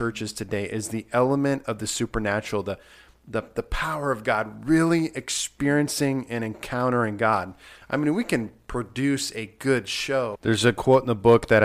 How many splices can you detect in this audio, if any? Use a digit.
1